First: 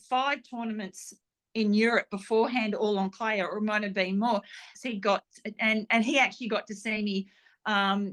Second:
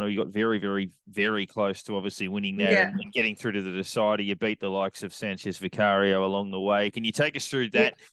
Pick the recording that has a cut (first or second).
first